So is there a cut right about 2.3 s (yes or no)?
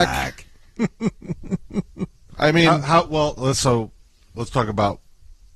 yes